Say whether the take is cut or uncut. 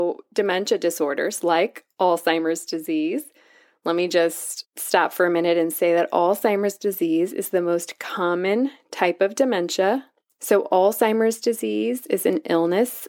cut